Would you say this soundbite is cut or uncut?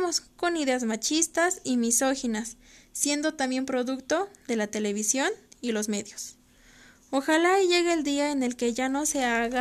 uncut